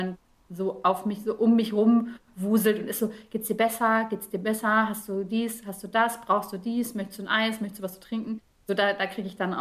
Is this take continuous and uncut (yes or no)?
yes